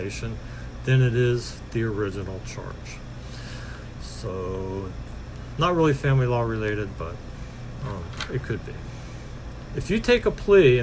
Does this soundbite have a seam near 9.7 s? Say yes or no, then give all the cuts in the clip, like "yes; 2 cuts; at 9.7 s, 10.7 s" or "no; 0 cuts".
yes; 1 cut; at 9.7 s